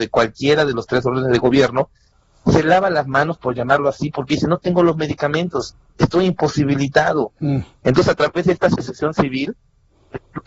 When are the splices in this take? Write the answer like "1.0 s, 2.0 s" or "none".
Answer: 7.8 s